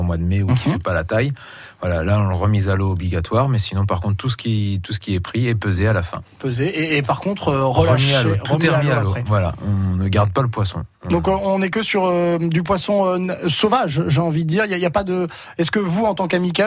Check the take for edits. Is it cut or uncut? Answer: uncut